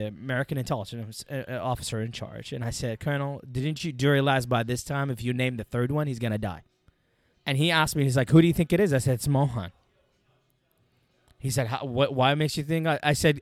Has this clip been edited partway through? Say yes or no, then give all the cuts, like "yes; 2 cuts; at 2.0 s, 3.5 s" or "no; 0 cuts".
yes; 1 cut; at 7.3 s